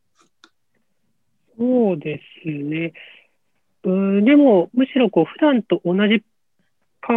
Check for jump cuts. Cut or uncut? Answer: cut